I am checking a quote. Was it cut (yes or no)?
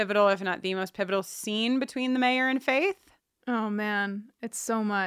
no